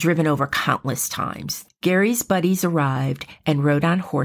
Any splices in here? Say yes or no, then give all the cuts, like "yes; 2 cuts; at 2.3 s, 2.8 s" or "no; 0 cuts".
yes; 1 cut; at 1.6 s